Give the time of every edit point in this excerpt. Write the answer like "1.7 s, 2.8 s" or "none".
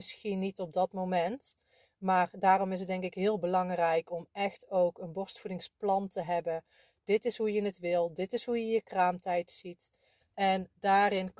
10.2 s